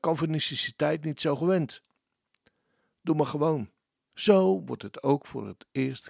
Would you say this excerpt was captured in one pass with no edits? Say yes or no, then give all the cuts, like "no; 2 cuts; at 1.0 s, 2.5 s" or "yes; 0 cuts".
no; 1 cut; at 4.1 s